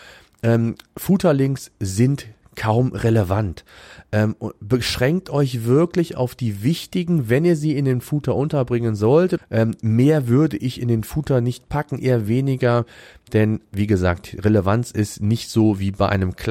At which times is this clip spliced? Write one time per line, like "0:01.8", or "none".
0:09.4